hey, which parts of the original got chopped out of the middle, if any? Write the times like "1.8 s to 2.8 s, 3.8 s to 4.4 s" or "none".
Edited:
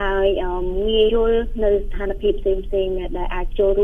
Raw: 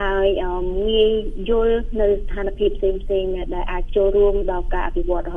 1.1 s to 1.5 s